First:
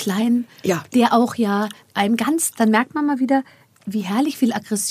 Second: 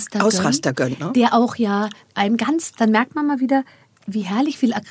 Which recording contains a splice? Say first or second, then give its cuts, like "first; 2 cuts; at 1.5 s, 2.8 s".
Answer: first; 1 cut; at 0.9 s